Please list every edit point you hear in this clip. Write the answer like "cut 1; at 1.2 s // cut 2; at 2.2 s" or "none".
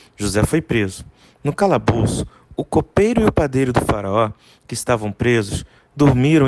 none